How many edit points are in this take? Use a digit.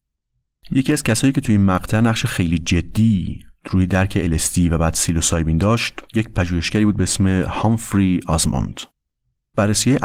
1